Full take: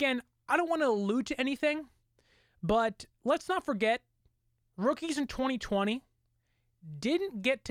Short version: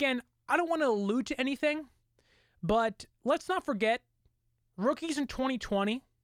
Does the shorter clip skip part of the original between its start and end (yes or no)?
no